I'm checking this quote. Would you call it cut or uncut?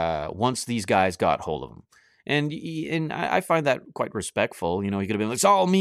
uncut